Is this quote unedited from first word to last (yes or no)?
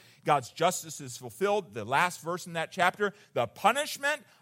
yes